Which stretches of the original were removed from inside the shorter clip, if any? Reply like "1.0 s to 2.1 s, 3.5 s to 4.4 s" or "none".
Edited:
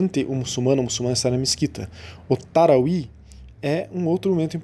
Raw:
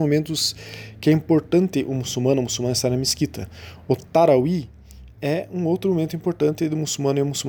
none